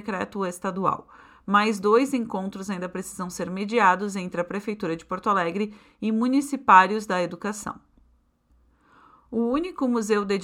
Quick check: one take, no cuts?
yes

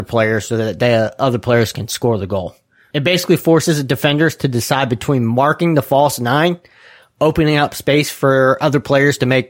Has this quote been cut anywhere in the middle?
no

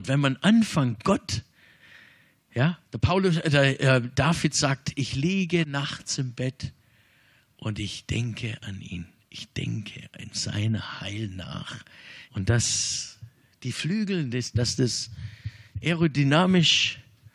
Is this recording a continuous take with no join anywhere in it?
no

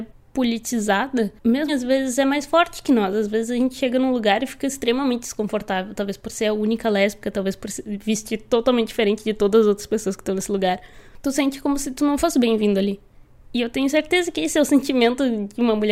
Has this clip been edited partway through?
yes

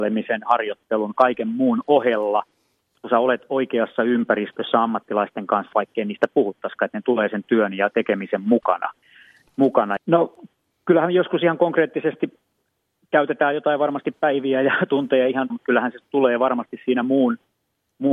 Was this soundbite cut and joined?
yes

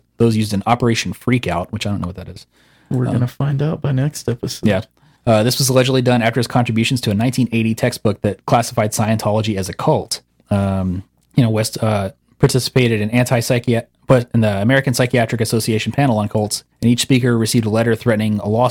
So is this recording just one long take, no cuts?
yes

